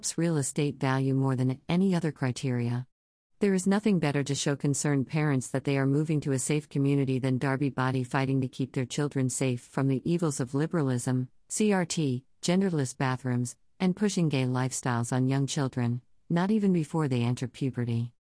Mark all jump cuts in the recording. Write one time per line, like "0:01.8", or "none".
none